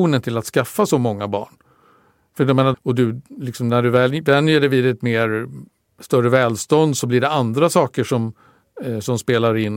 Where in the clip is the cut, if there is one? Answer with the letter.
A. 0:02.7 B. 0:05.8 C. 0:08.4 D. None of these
A